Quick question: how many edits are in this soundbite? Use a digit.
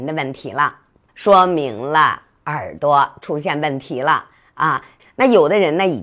2